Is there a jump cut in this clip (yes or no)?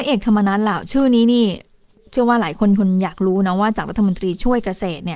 no